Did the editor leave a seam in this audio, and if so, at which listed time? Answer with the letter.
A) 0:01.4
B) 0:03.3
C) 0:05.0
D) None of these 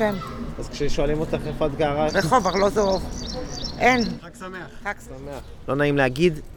C